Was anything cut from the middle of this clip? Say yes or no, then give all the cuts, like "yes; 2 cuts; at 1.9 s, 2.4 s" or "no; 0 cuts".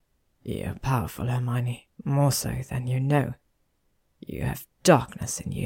no; 0 cuts